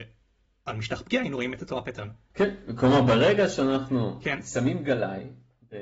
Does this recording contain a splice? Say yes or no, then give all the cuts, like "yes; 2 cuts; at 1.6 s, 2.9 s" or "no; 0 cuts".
no; 0 cuts